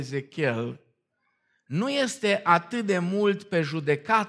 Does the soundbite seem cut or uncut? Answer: uncut